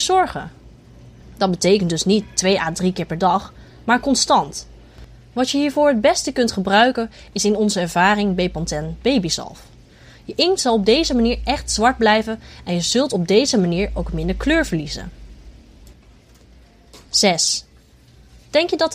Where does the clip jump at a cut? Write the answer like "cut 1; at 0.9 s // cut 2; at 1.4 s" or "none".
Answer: cut 1; at 1.2 s